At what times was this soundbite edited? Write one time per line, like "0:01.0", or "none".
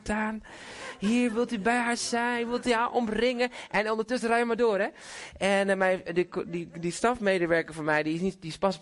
none